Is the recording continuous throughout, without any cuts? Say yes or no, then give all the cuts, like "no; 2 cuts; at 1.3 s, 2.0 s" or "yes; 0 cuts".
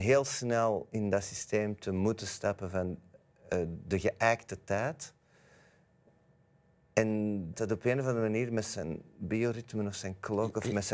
no; 1 cut; at 7.5 s